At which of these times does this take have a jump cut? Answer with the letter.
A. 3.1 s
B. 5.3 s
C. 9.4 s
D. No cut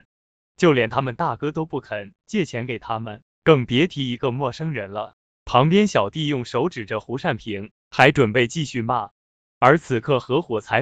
B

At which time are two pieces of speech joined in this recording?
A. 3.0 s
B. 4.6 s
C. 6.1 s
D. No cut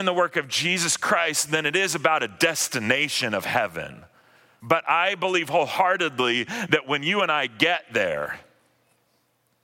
B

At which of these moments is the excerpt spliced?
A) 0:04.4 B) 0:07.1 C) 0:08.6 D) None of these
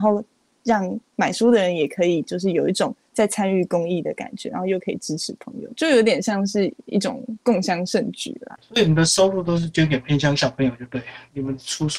D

